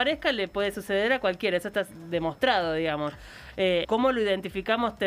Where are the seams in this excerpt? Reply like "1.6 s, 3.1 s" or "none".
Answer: 3.8 s